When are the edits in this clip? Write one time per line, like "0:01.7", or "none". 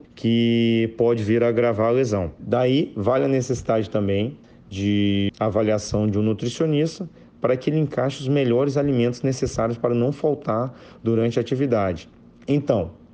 0:02.4

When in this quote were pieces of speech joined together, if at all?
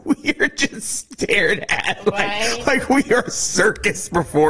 none

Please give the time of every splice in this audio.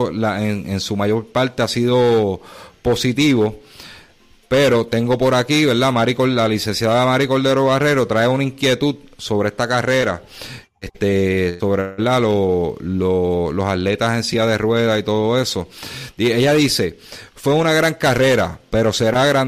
none

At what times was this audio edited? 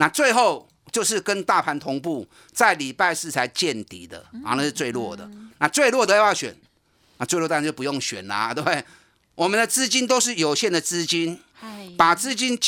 none

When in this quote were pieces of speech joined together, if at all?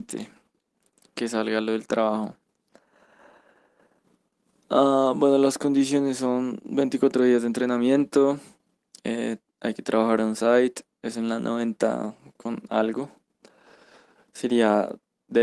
none

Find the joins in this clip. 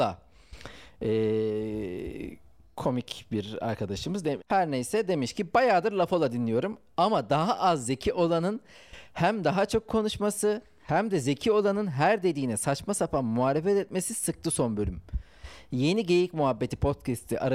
0:04.4

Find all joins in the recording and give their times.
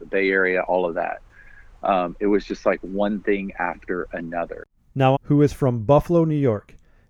0:05.2

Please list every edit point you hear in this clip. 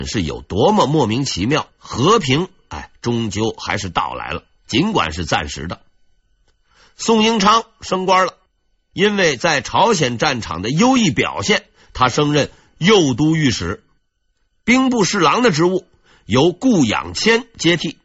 none

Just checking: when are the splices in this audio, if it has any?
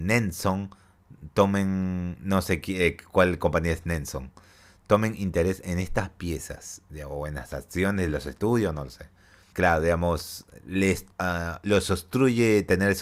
0:09.5
0:11.1

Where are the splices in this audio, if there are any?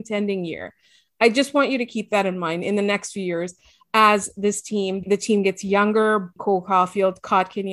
0:05.0
0:06.4

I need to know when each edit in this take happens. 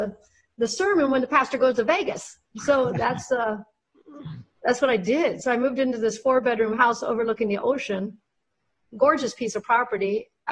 none

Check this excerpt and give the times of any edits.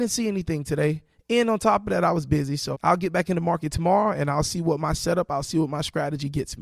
0:02.7

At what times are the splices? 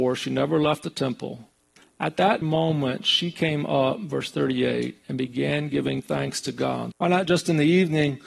0:02.4
0:06.9

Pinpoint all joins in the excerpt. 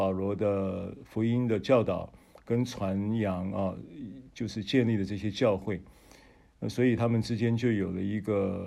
none

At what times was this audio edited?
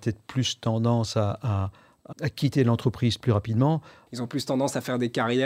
0:02.1
0:04.1

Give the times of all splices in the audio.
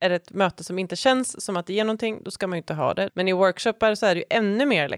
0:03.1

